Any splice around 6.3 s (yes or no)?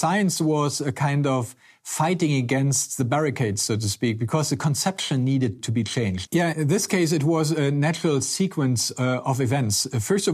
yes